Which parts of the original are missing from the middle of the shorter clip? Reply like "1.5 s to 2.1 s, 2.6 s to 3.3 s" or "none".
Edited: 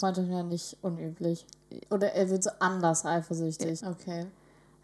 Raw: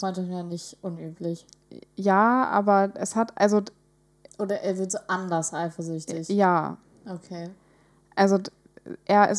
1.9 s to 4.3 s, 6.3 s to 7.0 s

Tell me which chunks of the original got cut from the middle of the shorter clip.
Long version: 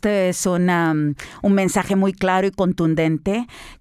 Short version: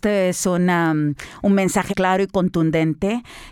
1.9 s to 2.1 s

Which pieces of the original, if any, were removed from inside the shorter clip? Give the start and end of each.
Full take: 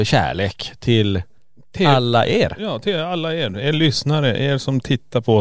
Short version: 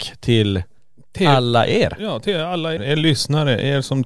3.4 s to 3.5 s

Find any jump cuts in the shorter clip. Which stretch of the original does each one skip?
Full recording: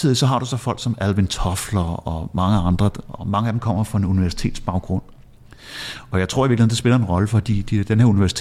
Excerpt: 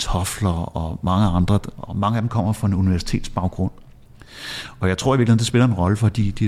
none

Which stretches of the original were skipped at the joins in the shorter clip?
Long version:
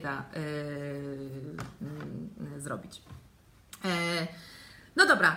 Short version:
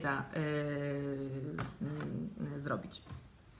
none

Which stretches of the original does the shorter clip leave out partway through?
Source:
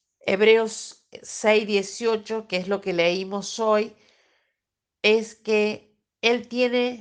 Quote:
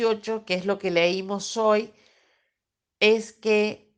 none

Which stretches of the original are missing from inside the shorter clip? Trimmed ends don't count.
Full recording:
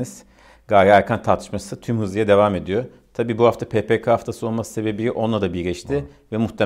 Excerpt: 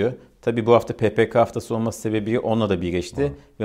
none

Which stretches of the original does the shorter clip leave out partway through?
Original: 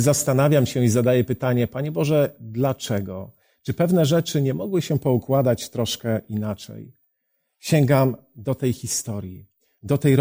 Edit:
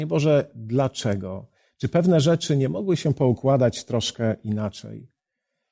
none

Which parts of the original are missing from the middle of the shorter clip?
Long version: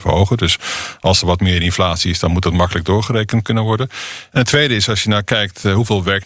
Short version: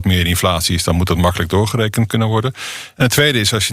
none

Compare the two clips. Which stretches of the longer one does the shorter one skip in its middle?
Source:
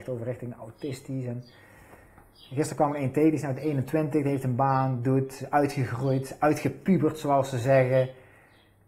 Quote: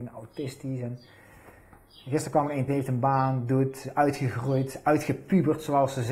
3.1 s to 4.2 s

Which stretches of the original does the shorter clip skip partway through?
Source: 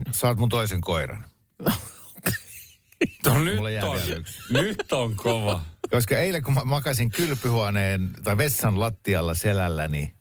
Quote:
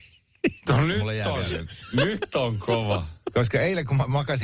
none

